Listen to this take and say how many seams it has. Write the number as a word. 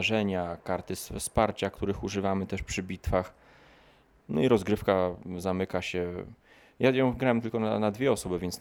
zero